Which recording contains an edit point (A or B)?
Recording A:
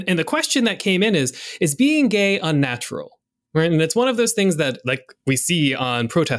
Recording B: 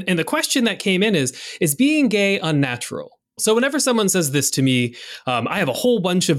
B